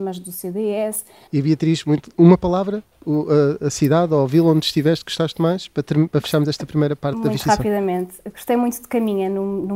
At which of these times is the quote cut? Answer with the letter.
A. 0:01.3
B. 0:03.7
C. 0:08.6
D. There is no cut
A